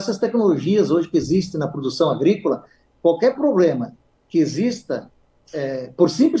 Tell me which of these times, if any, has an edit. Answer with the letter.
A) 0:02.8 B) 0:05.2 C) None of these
C